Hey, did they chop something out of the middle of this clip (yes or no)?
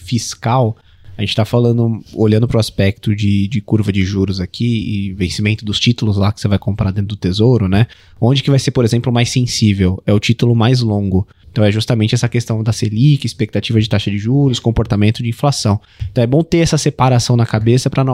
yes